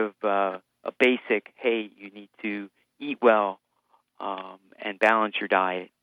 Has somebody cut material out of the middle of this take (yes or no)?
no